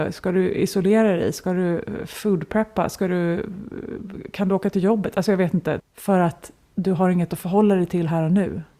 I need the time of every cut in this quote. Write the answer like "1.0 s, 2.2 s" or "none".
5.8 s